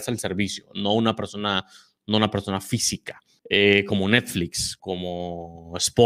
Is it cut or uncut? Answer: cut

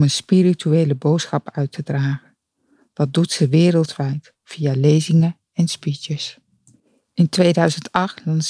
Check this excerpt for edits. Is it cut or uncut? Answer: uncut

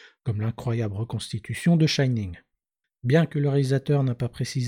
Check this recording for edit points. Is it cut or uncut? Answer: cut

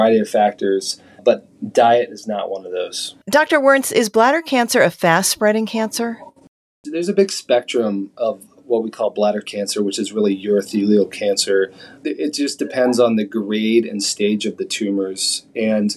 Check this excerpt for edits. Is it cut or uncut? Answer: cut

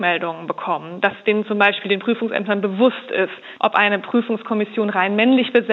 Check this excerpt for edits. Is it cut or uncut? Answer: cut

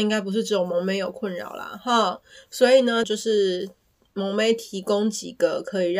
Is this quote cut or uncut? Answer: cut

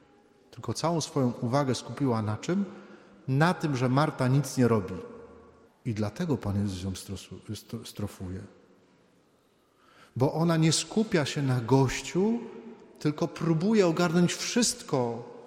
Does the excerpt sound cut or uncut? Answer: cut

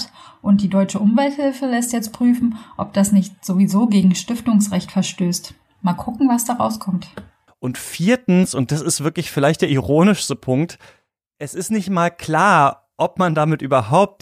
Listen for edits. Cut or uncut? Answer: cut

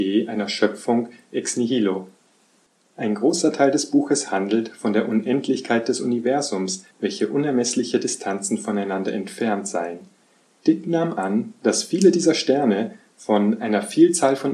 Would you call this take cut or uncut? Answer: cut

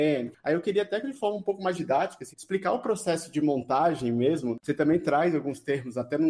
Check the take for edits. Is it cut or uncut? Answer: cut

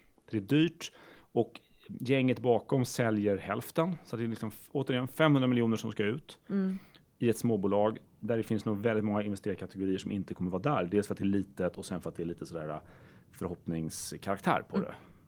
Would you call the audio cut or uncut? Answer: uncut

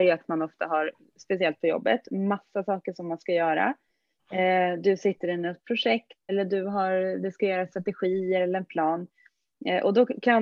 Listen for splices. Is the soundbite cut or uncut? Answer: cut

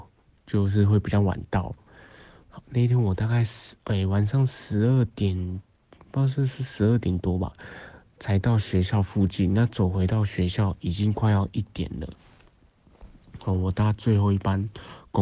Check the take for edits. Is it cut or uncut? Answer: uncut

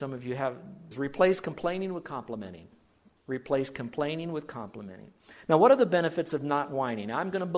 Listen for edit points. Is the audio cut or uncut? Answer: cut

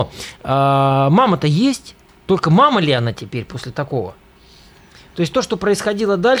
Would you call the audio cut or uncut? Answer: uncut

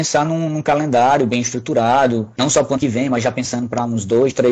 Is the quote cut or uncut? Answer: uncut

